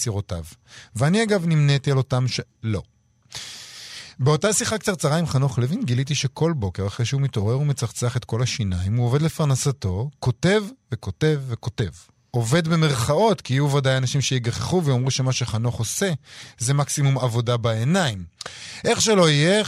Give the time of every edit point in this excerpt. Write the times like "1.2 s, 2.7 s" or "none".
2.5 s